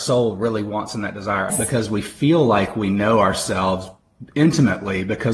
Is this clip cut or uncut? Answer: cut